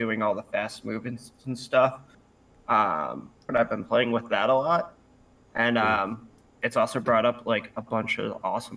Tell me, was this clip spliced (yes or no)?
yes